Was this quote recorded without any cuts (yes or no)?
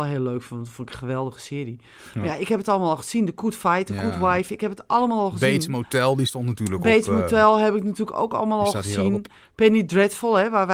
yes